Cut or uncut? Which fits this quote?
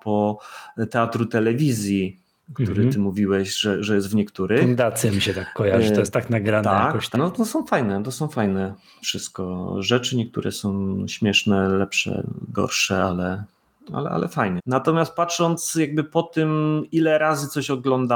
cut